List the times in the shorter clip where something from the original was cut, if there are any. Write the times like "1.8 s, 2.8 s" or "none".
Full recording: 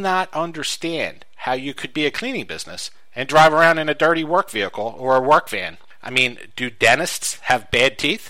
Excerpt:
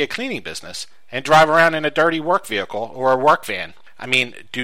none